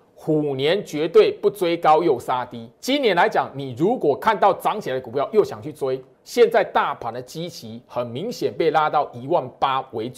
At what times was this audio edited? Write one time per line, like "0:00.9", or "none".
0:02.7
0:06.1